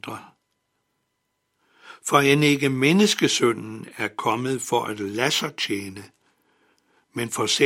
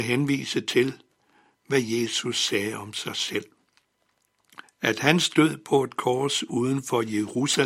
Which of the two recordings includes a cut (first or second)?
second